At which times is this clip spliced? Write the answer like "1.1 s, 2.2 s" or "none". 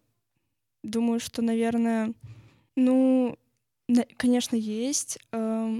2.7 s